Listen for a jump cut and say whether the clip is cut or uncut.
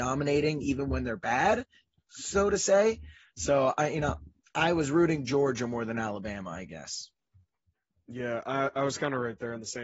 uncut